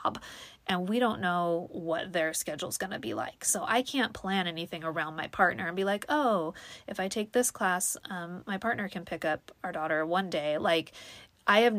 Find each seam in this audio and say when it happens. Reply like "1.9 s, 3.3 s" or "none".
none

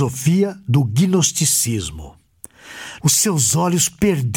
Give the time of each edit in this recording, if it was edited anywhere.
3.0 s

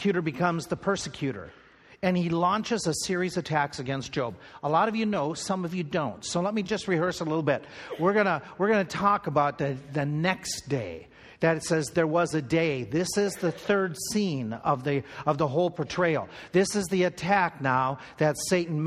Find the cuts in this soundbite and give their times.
none

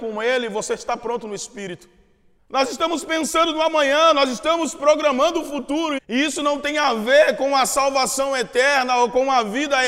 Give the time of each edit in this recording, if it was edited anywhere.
2.4 s, 6.0 s

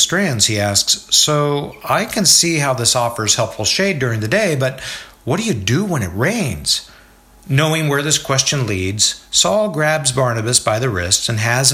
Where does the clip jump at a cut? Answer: none

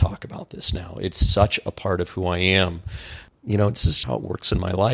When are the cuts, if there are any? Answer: 4.0 s

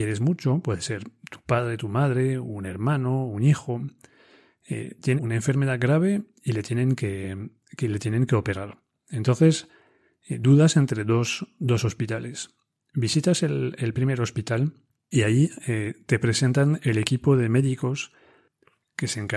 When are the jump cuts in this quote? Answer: 5.2 s

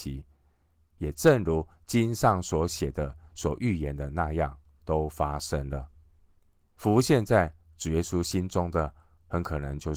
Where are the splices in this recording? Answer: 6.8 s

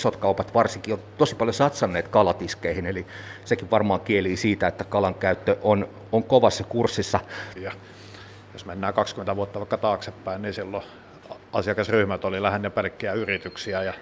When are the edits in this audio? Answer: 7.6 s

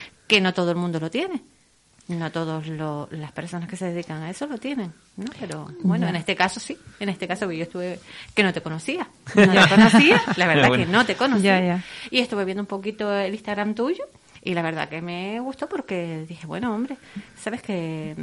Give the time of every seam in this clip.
none

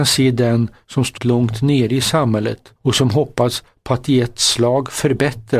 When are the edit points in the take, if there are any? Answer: 1.2 s, 2.8 s

